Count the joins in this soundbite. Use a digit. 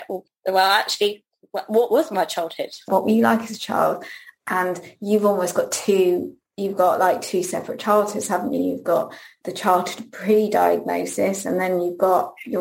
1